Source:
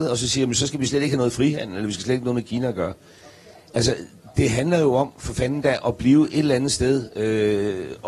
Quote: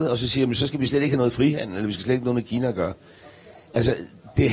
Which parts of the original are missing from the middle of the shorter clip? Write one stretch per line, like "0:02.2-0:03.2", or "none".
none